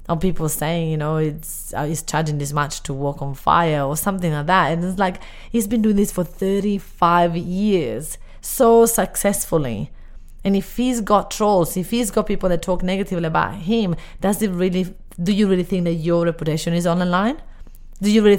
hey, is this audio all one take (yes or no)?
yes